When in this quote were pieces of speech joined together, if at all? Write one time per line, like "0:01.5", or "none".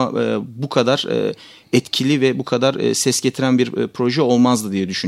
none